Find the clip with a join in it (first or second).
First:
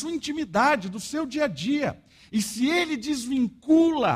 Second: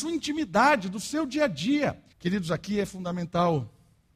second